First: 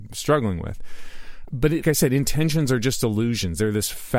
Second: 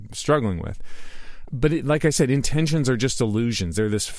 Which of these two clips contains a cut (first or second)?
first